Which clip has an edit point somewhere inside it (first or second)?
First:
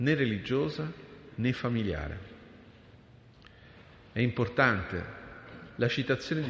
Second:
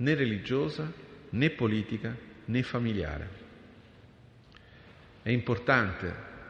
first